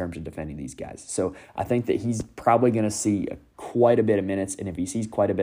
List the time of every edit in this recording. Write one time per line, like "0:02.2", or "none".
none